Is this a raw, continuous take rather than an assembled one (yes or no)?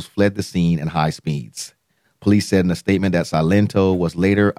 yes